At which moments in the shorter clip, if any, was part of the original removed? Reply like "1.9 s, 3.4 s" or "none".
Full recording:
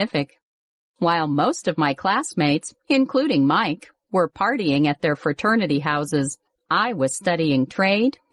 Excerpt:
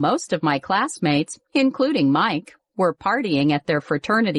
none